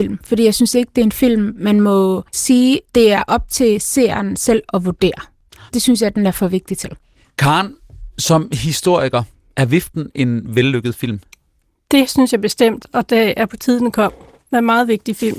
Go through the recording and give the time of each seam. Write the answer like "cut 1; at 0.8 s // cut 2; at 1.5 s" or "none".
cut 1; at 2.3 s